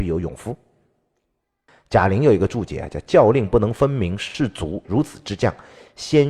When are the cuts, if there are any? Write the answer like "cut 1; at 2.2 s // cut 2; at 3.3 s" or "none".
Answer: cut 1; at 1.7 s // cut 2; at 4.8 s